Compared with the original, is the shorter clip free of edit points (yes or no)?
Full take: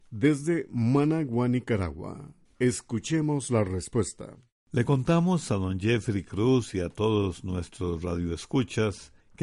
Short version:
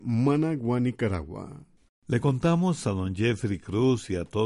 no